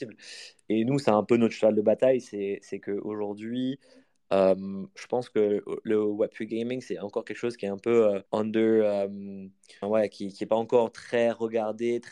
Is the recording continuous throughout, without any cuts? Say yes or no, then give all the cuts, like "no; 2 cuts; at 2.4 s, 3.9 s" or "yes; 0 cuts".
no; 2 cuts; at 8.3 s, 9.8 s